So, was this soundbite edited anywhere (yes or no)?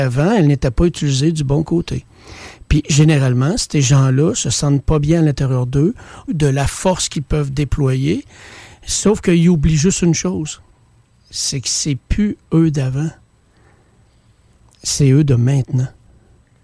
yes